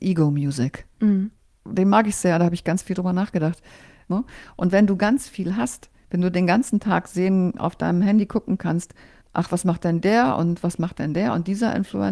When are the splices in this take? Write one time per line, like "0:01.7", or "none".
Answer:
0:04.1
0:09.2